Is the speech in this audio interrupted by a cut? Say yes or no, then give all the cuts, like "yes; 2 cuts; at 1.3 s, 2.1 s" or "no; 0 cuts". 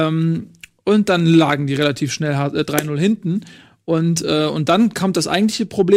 no; 0 cuts